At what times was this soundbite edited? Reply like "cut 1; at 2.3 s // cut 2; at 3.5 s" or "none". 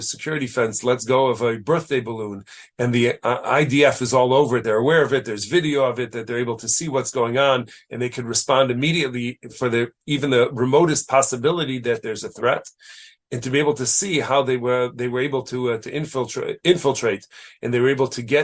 none